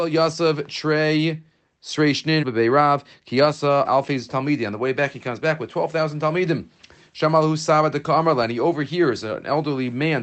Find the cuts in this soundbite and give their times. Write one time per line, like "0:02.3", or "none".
0:02.4
0:03.8